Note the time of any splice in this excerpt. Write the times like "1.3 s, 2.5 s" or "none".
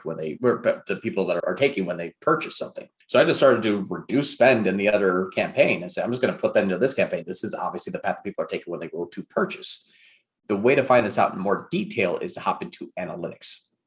none

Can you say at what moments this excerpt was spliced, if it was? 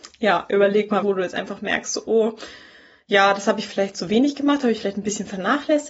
1.0 s

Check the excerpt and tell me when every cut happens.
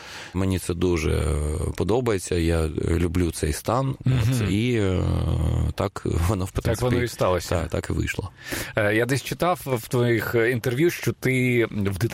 4.0 s

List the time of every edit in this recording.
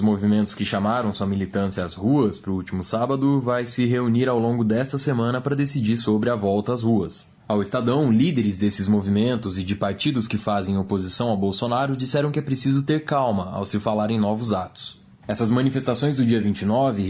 none

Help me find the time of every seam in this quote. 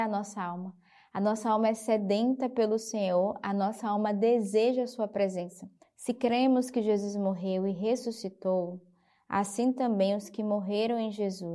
5.8 s

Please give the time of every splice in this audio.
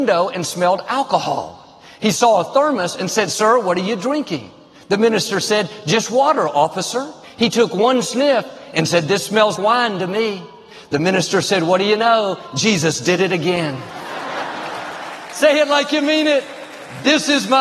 7.2 s, 9.6 s

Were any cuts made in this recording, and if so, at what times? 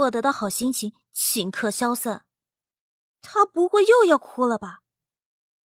3.1 s

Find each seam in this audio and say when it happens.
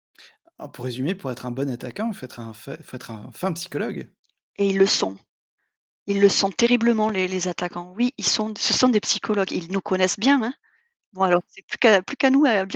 none

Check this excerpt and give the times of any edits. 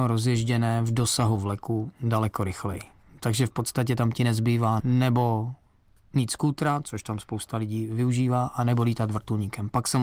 4.8 s

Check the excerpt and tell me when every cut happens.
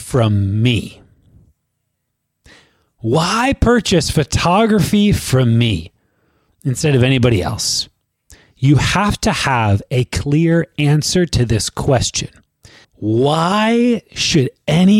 12.8 s

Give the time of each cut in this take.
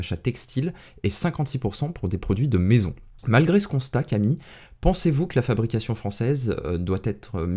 none

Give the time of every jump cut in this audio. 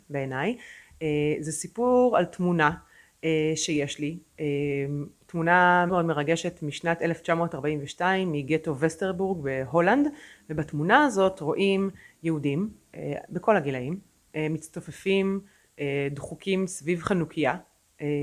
5.9 s

